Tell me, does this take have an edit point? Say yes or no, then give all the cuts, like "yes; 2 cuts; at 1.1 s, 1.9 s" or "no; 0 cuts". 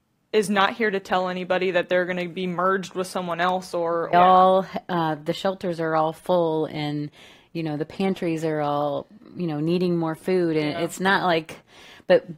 yes; 1 cut; at 4.1 s